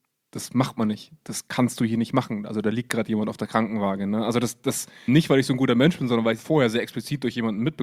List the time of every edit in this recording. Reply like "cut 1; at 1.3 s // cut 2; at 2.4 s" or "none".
cut 1; at 5.1 s // cut 2; at 6.4 s